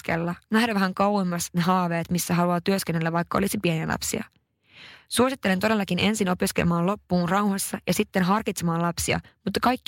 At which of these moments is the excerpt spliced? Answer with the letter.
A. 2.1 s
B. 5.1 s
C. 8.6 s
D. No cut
D